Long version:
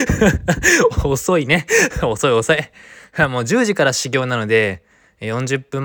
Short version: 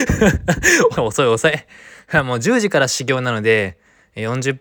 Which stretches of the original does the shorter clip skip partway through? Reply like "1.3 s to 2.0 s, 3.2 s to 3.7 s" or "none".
1.0 s to 2.0 s